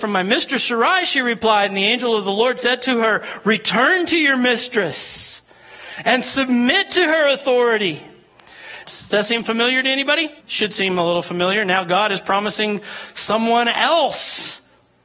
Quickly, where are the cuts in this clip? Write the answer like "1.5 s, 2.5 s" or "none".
8.8 s, 10.4 s